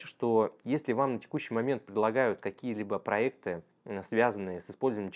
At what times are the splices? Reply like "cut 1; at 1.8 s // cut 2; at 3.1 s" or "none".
none